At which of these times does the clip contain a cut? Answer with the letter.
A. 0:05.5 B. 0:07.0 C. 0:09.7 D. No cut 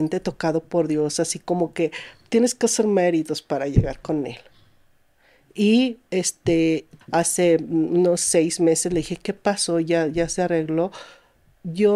B